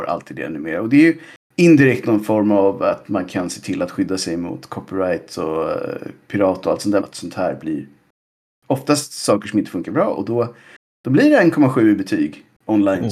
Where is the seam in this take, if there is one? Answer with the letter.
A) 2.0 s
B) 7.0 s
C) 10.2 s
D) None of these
B